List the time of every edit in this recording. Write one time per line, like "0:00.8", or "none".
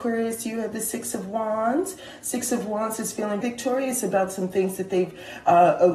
0:03.4

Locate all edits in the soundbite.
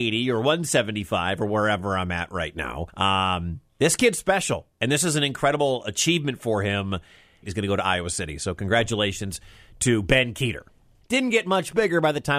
0:02.9
0:07.4
0:11.0

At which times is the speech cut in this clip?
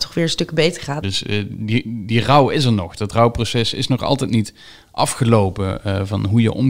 0:01.0

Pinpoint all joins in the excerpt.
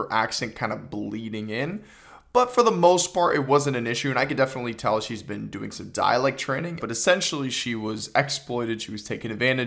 0:06.8

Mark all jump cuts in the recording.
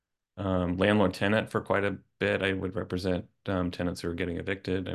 none

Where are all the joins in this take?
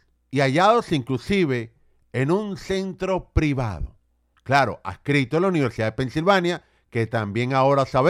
none

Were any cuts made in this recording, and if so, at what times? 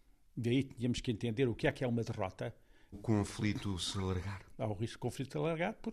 0:02.9
0:04.5

